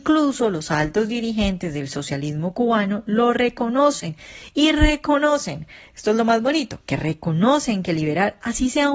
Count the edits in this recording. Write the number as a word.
zero